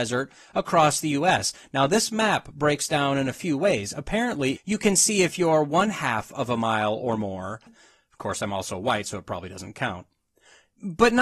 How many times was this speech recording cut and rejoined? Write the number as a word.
two